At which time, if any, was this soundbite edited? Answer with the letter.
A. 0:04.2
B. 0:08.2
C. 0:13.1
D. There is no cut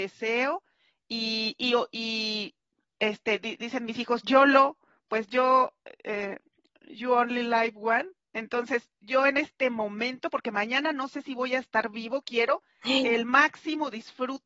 D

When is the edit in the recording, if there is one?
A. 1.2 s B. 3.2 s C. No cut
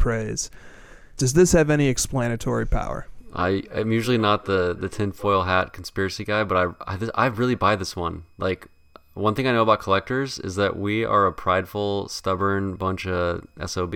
A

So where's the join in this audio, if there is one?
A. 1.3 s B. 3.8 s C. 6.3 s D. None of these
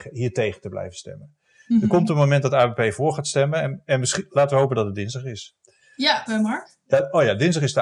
C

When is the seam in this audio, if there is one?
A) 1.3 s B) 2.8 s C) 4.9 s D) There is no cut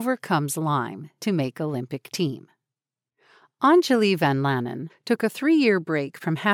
C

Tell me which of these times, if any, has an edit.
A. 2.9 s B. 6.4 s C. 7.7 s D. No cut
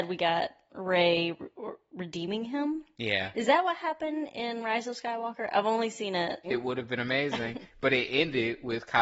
B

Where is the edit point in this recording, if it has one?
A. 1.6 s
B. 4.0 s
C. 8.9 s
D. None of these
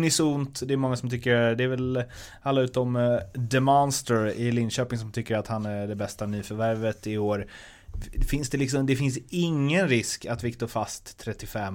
D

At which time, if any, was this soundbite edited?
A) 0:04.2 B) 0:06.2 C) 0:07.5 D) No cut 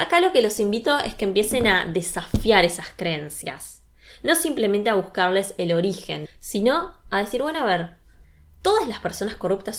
B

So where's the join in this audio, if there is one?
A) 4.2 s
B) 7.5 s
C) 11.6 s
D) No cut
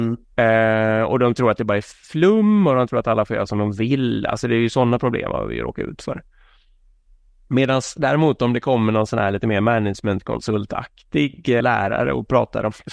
C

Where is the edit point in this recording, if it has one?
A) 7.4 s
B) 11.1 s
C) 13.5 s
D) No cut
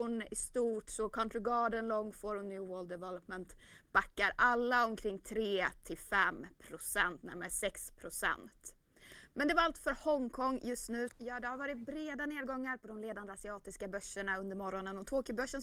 B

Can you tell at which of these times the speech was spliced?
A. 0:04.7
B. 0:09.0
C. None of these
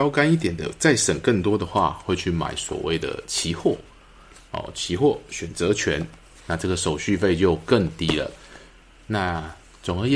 C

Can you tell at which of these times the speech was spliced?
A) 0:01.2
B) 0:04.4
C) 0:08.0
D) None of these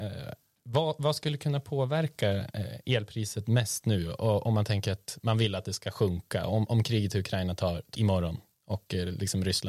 C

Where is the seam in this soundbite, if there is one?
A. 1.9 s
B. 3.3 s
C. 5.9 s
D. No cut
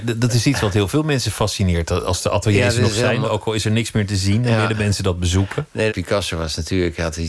C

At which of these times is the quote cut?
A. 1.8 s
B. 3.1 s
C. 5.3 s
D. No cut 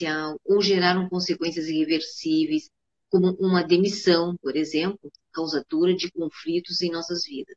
C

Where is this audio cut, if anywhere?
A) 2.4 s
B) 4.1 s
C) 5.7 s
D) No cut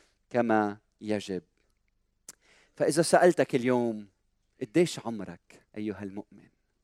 C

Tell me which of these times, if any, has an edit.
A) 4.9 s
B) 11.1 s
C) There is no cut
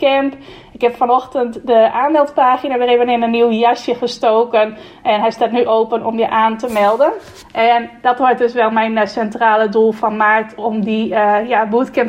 C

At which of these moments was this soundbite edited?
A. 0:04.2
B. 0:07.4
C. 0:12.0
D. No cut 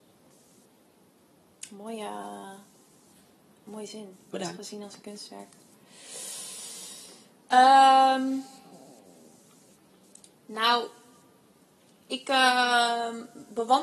D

